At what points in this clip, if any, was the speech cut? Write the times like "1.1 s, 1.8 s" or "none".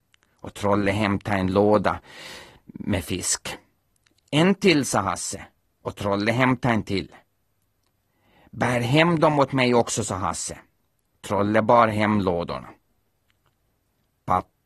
none